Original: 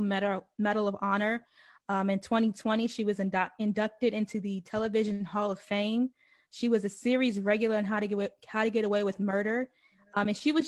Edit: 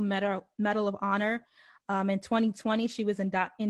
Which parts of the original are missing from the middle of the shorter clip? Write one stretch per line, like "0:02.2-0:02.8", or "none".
none